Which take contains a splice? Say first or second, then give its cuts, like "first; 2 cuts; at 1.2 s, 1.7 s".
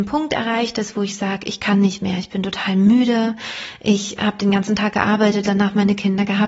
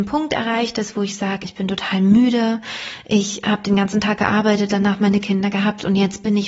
second; 1 cut; at 1.4 s